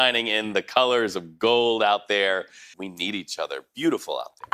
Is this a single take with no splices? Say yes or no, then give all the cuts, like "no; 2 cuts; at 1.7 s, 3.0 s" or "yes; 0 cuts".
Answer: no; 1 cut; at 2.7 s